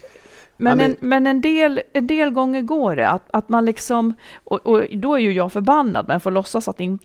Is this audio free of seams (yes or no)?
yes